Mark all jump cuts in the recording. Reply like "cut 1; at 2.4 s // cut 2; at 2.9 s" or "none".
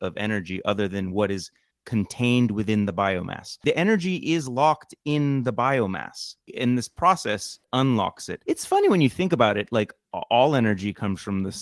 none